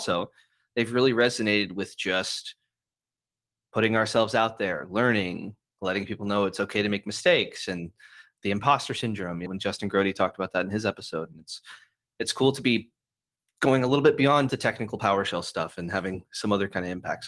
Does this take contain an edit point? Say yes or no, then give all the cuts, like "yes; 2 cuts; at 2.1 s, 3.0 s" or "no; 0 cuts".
yes; 2 cuts; at 9.5 s, 14.5 s